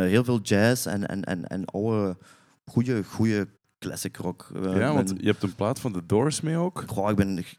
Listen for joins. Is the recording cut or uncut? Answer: uncut